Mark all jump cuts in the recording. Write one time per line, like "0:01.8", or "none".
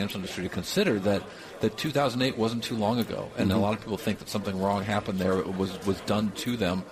none

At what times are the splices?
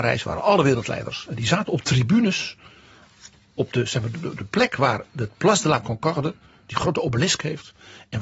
0:04.1

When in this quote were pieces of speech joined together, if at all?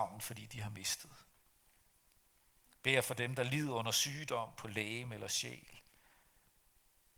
none

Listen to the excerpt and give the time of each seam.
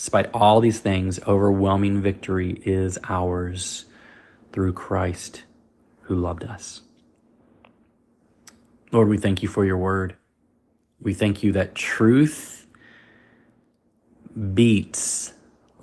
none

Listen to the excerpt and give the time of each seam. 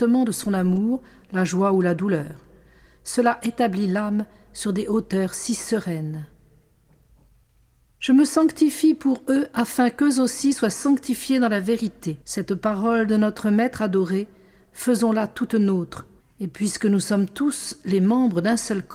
0:12.2
0:16.2

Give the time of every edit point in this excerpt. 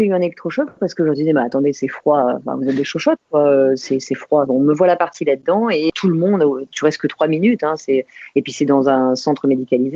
0:04.5
0:05.9

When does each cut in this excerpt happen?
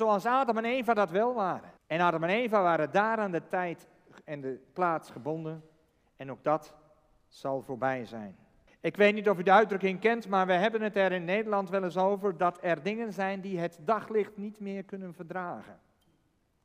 0:01.8
0:08.7

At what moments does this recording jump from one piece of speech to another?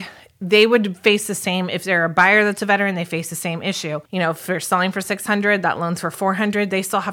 0:04.1

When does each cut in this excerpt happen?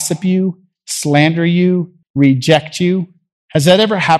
0:02.0

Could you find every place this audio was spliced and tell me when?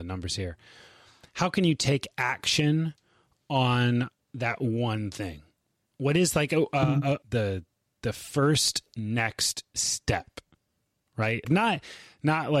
0:07.2
0:11.4

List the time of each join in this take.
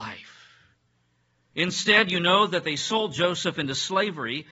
0:01.5

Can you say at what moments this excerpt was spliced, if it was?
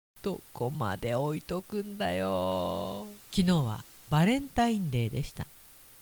0:03.2

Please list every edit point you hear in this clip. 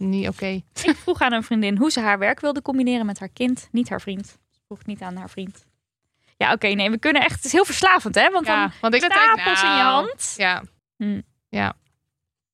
0:09.0
0:10.8

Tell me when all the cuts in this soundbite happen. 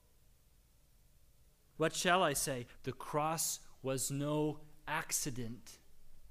0:01.7
0:02.8

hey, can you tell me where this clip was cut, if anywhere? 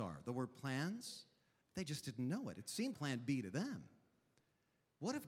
0:01.6
0:02.9

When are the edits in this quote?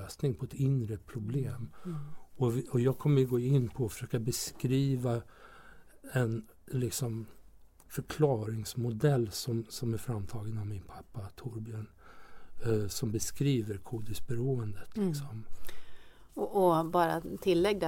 none

